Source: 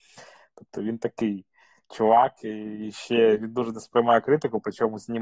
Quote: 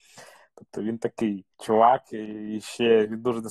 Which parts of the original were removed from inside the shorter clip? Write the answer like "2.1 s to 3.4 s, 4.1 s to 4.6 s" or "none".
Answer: 1.5 s to 1.8 s